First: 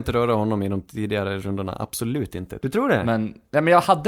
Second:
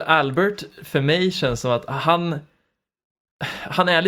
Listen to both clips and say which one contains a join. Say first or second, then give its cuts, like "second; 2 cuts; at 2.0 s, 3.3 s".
first; 1 cut; at 2.6 s